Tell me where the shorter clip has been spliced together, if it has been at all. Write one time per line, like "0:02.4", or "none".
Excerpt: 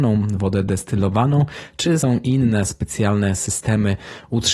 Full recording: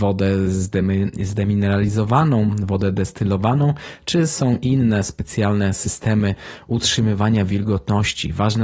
0:02.0